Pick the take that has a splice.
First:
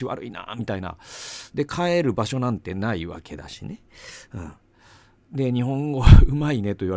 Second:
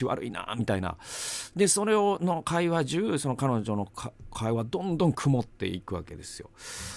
first; 1 cut; at 1.5 s

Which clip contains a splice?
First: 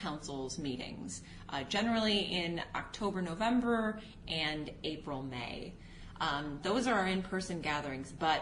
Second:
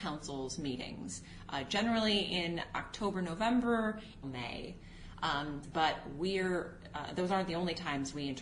second; 2 cuts; at 4.2 s, 5.6 s

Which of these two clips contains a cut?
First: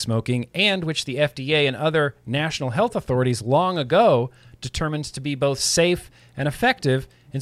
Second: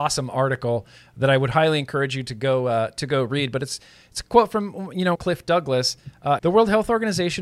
second; 2 cuts; at 5.1 s, 6.4 s

